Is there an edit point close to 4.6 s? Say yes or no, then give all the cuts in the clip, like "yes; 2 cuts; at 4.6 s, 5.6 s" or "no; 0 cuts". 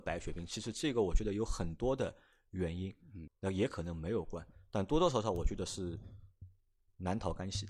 no; 1 cut; at 3.3 s